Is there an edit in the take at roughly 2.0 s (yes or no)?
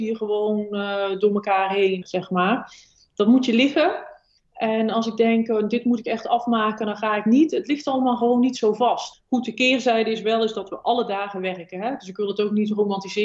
yes